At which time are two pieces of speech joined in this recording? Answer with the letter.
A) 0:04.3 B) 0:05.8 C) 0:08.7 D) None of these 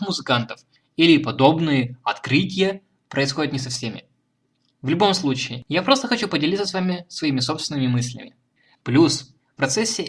C